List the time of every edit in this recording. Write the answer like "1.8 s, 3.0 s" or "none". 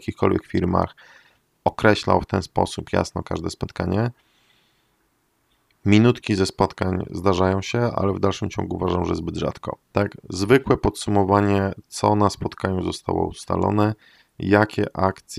9.8 s